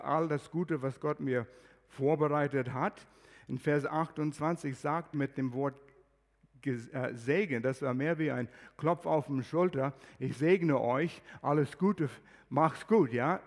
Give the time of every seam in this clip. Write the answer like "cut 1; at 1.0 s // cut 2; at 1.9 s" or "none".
cut 1; at 5.1 s